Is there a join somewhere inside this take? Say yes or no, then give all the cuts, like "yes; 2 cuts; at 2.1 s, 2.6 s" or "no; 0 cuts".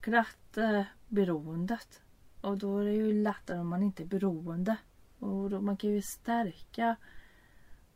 no; 0 cuts